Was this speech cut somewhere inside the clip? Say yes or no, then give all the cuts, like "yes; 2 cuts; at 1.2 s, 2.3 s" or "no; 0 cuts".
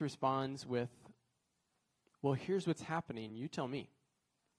no; 0 cuts